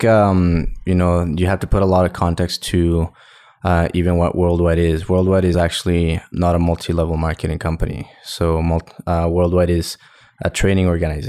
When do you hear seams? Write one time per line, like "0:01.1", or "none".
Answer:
none